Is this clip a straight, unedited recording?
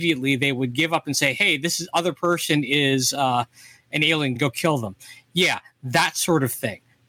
yes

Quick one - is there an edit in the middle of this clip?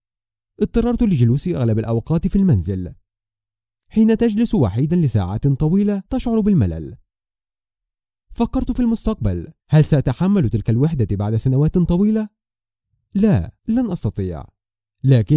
yes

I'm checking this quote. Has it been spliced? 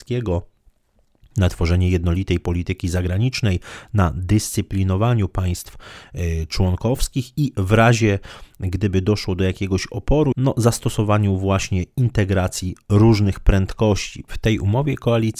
yes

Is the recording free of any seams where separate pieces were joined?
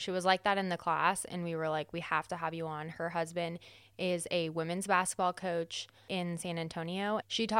yes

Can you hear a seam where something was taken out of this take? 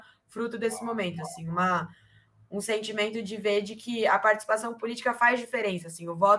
no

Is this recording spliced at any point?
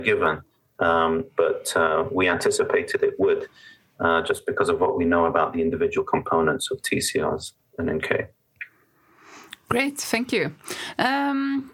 no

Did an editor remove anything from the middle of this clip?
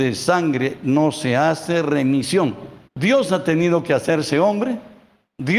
yes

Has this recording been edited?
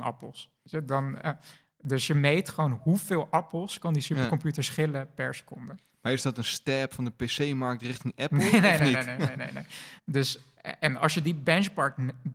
yes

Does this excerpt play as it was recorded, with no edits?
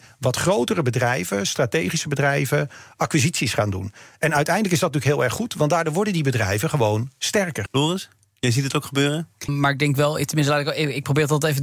no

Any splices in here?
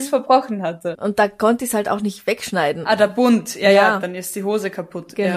yes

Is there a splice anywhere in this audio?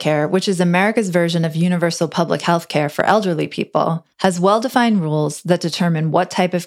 yes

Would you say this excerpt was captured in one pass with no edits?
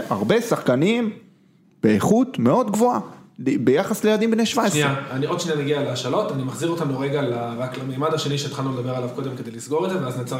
yes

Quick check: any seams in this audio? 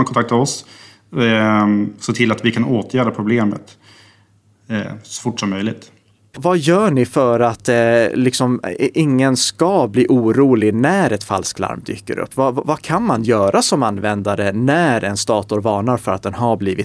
yes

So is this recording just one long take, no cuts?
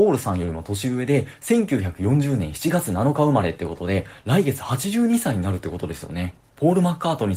yes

